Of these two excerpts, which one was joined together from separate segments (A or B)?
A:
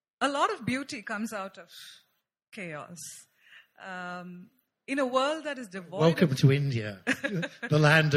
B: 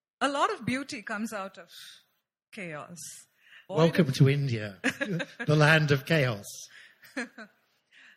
B